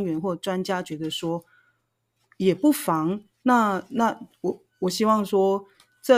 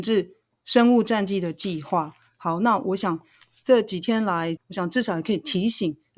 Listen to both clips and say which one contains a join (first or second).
second